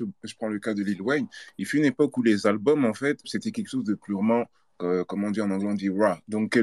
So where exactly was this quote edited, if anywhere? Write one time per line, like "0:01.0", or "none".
0:03.2